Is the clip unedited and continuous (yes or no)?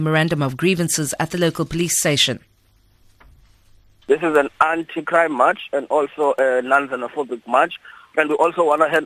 yes